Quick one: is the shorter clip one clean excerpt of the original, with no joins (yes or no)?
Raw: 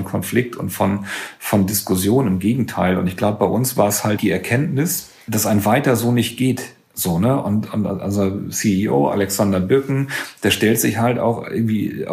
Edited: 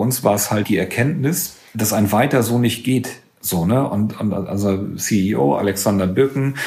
yes